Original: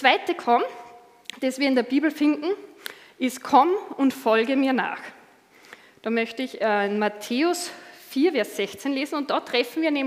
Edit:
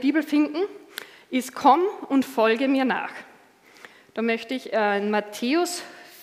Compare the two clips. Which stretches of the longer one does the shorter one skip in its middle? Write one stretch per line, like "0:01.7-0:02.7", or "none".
none